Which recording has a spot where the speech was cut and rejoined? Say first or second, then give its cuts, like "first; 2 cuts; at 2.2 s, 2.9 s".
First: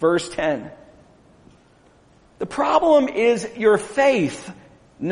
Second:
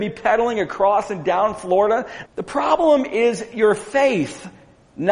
second; 1 cut; at 2.2 s